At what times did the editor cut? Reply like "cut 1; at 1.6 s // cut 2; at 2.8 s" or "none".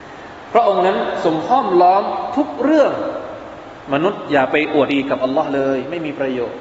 cut 1; at 4.9 s